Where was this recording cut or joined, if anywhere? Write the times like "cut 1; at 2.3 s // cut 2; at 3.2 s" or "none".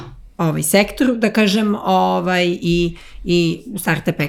none